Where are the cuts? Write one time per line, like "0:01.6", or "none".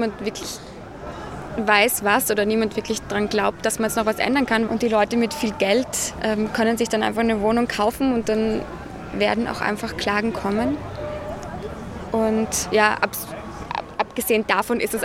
0:04.7